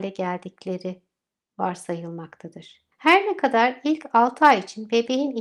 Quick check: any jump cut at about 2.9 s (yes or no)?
yes